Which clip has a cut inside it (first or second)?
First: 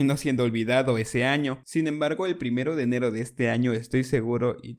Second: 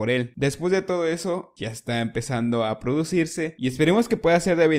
second